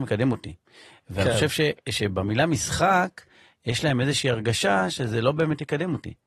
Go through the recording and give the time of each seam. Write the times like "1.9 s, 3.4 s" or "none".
none